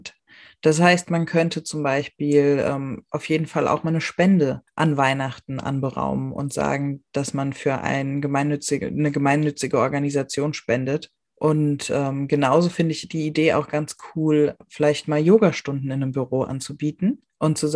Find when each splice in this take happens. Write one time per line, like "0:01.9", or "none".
0:11.2